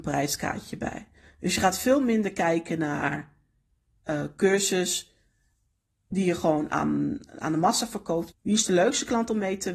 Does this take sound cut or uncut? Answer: cut